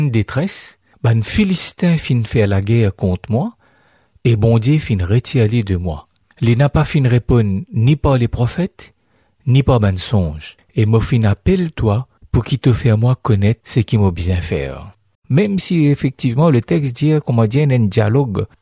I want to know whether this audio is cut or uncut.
cut